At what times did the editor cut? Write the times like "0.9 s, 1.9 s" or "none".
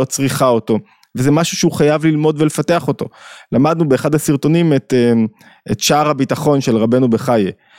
none